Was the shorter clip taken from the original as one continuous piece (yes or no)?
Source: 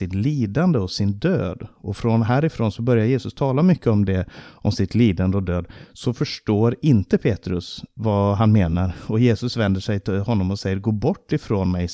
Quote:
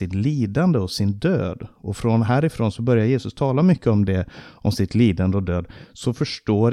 yes